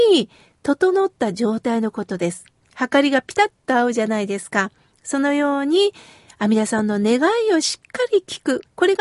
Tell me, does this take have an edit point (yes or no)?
no